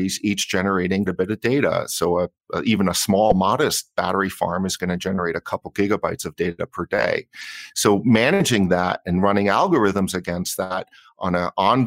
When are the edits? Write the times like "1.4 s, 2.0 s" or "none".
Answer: 1.1 s